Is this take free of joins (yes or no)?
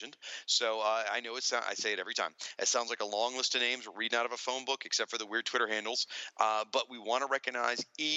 yes